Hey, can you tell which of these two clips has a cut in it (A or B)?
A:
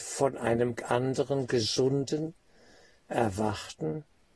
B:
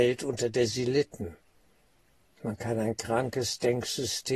B